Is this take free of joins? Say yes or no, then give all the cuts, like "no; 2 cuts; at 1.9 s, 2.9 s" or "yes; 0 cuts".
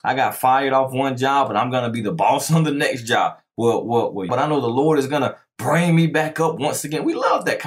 no; 1 cut; at 4.3 s